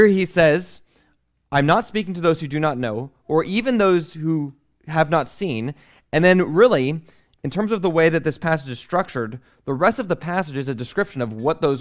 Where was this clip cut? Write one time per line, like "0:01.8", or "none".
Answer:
none